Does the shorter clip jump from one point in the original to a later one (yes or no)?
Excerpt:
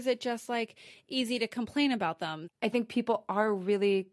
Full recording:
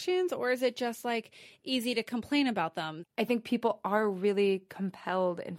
no